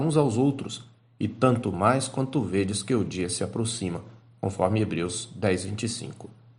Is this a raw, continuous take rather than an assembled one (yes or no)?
yes